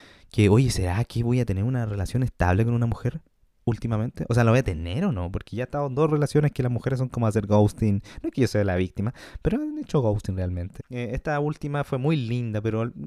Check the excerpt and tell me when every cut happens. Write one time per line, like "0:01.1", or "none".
0:10.8

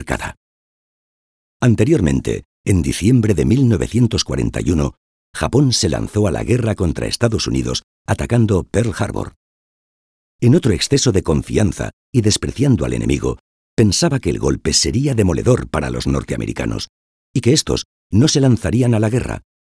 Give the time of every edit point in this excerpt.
0:10.3

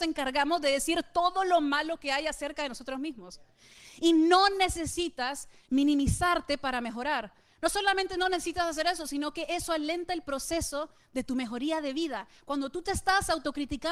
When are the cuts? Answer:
none

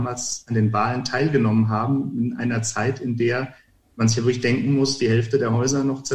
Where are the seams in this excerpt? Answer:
none

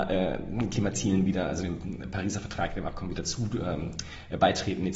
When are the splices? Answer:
none

